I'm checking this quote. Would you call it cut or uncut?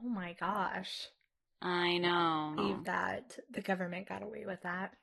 cut